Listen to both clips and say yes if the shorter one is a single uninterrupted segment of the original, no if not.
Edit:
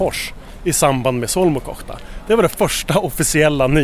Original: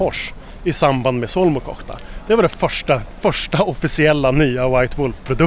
no